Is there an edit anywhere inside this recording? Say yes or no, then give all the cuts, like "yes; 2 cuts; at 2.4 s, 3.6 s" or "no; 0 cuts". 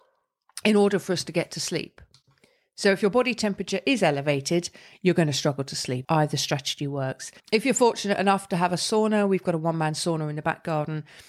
yes; 2 cuts; at 6.0 s, 7.4 s